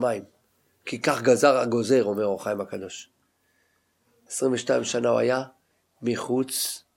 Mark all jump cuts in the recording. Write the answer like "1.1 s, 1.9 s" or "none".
4.3 s